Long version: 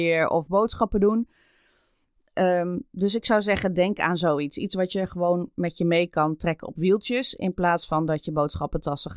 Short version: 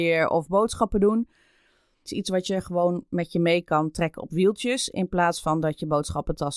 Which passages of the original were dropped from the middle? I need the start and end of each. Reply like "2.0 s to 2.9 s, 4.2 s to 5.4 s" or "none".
2.1 s to 4.5 s